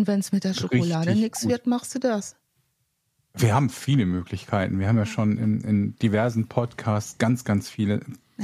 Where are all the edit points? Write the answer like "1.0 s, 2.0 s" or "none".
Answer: 5.4 s